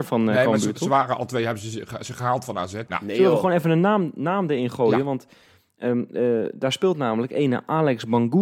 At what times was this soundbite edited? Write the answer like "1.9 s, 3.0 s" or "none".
2.9 s